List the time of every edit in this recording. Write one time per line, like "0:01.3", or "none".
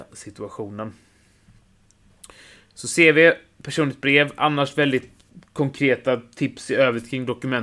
none